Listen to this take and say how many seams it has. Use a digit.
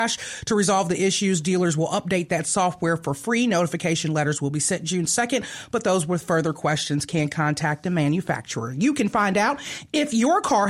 0